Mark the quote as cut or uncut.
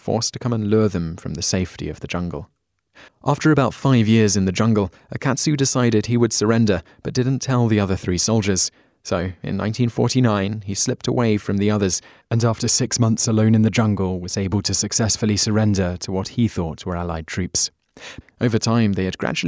cut